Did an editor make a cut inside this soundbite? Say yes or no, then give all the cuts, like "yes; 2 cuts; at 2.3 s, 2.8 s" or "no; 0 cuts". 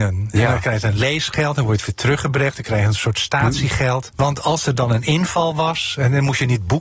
yes; 1 cut; at 4.1 s